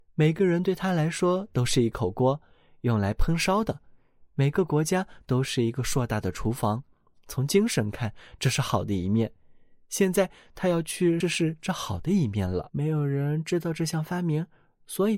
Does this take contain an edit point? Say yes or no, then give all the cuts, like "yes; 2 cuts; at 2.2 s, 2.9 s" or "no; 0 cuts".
yes; 2 cuts; at 11.2 s, 12.7 s